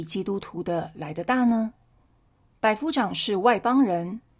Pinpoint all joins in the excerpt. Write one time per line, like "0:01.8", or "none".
0:02.5

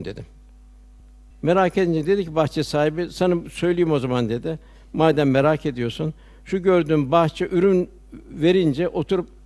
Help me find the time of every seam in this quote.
0:01.3

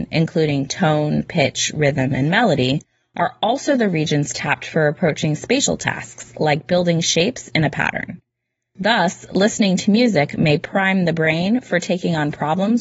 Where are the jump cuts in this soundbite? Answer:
none

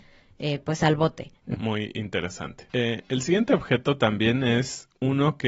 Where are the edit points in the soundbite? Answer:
0:01.5
0:02.7

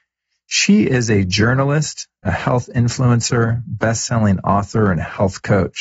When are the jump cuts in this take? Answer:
none

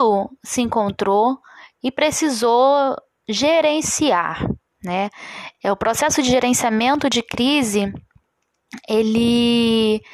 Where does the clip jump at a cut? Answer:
none

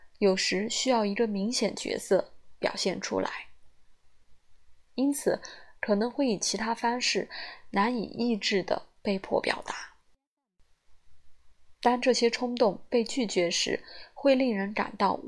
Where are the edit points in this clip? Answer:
0:05.7

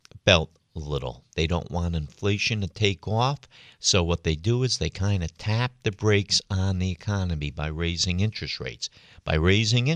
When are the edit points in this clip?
0:01.3

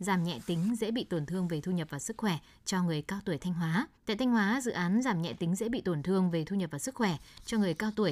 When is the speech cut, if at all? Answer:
0:04.0

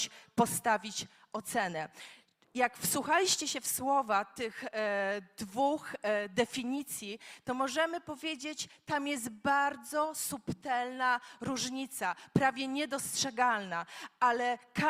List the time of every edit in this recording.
none

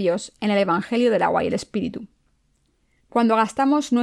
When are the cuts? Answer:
0:03.0

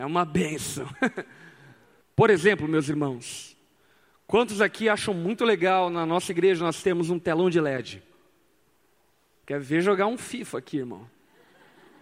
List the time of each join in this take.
0:02.0
0:09.4

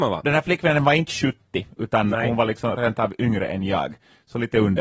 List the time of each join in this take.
none

